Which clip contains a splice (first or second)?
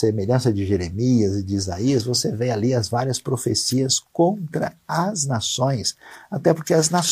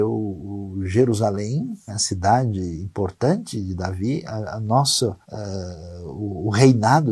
second